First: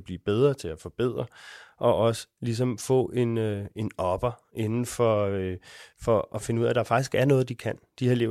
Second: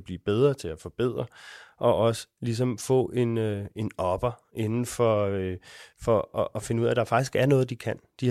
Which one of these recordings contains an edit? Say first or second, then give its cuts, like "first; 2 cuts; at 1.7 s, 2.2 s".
first; 1 cut; at 6.3 s